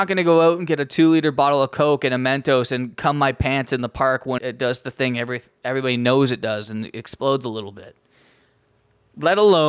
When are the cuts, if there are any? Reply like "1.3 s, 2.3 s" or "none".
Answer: 4.4 s